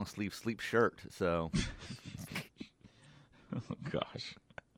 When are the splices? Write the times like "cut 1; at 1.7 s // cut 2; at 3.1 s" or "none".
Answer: cut 1; at 2.5 s